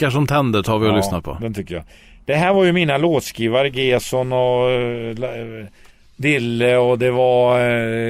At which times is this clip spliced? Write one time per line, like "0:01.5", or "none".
none

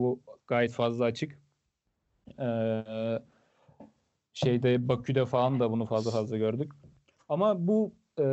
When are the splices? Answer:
none

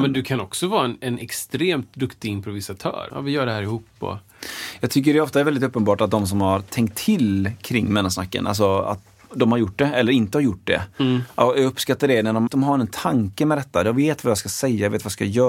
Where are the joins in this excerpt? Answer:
0:03.1
0:12.5

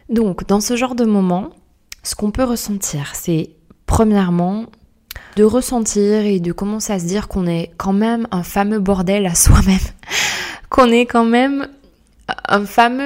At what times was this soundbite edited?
0:05.4

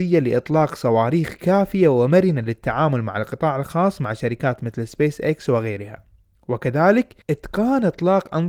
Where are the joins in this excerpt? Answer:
0:07.2

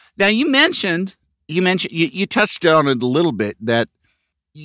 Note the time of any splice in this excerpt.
none

